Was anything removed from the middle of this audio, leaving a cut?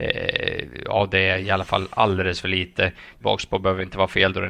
yes; 1 cut; at 3.2 s

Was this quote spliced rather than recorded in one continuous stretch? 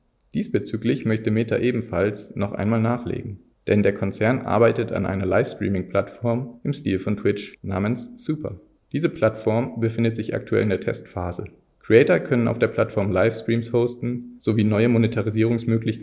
no; 0 cuts

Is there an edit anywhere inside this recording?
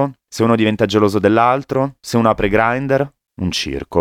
no; 0 cuts

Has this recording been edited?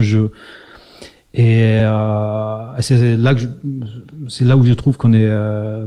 no; 0 cuts

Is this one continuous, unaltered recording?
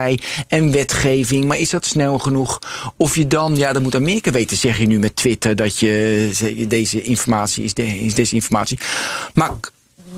yes; 0 cuts

